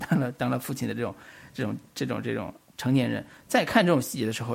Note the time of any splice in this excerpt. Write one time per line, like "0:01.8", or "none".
none